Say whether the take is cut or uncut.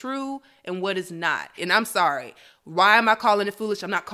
cut